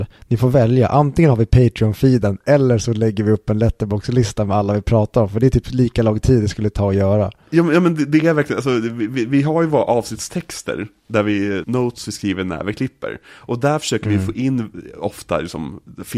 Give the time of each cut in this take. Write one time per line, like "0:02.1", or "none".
0:11.6